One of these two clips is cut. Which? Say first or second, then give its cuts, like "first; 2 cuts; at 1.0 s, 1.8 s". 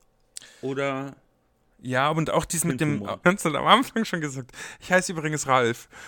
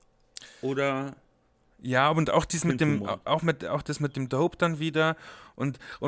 first; 1 cut; at 3.2 s